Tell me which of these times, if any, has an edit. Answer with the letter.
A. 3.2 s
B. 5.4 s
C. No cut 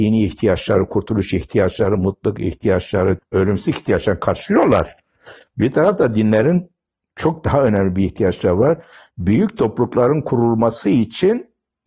A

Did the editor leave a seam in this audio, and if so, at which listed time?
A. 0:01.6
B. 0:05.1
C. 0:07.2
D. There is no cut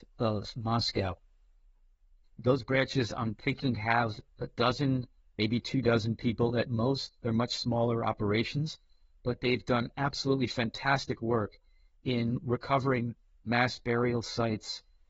D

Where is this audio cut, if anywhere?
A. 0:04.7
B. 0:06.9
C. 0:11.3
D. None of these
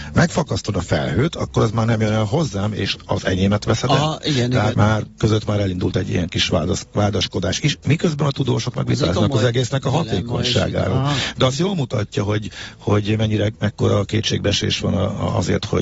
A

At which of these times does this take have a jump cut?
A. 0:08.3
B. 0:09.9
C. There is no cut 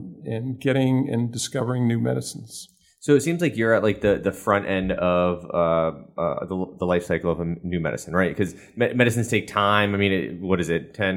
C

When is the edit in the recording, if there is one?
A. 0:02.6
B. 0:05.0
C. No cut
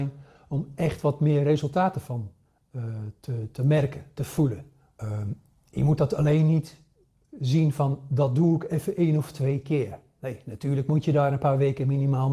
B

